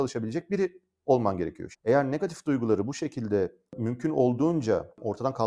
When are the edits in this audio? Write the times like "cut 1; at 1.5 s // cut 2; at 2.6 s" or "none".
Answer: cut 1; at 1.7 s